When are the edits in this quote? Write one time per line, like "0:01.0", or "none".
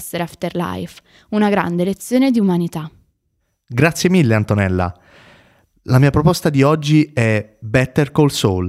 none